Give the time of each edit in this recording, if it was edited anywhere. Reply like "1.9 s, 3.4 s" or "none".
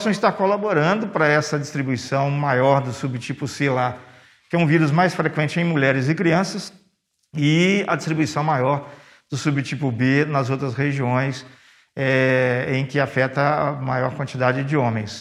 none